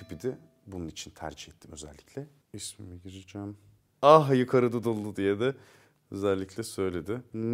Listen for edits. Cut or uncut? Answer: cut